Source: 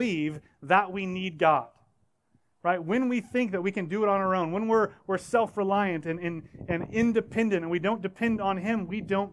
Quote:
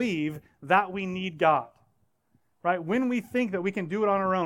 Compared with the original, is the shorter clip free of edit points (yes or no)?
yes